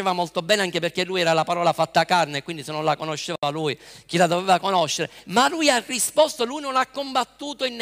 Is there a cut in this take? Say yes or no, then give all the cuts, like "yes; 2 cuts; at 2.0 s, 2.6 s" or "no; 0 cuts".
no; 0 cuts